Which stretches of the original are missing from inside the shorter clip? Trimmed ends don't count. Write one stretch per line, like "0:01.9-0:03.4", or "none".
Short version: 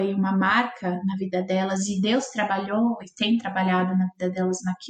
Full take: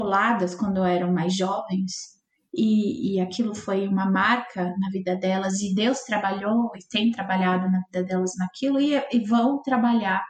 none